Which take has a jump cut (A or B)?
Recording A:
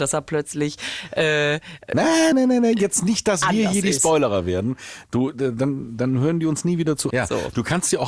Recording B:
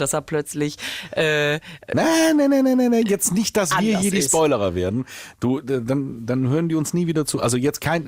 A